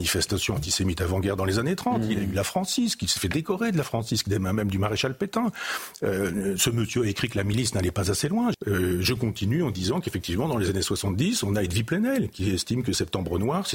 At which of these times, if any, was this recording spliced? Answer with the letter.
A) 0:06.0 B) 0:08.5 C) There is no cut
B